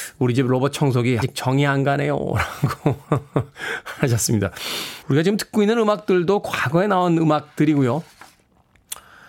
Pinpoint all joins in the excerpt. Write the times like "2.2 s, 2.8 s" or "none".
1.2 s, 5.0 s